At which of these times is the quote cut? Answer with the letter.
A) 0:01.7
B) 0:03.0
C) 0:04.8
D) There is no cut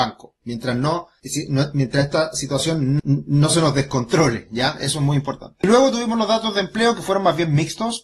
B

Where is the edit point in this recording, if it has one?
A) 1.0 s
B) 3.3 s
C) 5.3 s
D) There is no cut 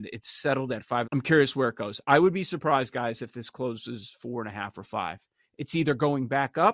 A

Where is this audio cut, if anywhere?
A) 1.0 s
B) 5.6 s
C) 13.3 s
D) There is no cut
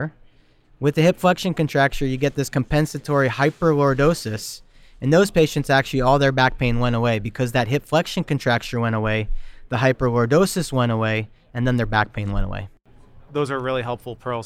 C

